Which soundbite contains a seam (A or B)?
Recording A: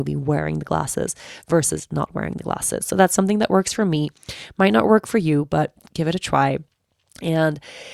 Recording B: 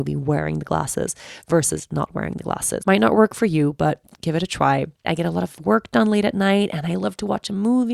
B